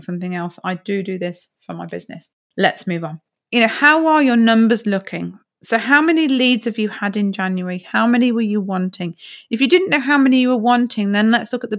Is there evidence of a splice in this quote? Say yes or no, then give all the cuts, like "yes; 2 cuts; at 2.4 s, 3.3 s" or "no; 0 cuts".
no; 0 cuts